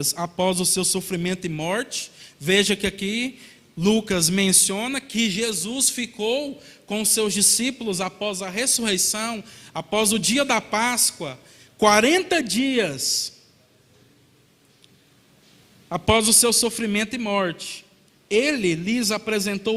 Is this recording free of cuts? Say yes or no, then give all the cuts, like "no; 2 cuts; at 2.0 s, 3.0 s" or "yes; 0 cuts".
no; 1 cut; at 18.1 s